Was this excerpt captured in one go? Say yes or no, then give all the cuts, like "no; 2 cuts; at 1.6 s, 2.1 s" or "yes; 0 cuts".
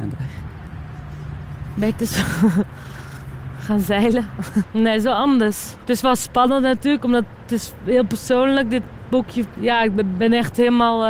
no; 1 cut; at 4.6 s